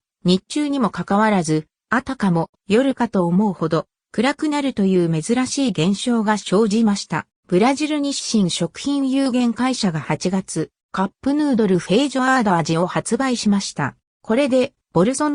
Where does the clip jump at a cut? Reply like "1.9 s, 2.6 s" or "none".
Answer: 7.4 s, 14.1 s